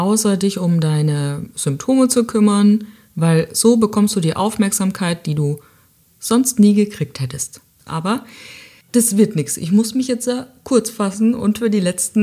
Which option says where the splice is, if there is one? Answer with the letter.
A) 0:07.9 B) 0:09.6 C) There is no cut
A